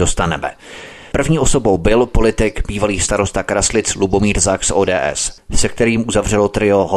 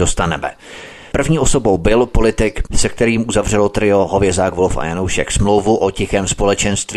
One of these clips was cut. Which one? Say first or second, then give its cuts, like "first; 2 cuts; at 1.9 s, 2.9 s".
second; 1 cut; at 2.7 s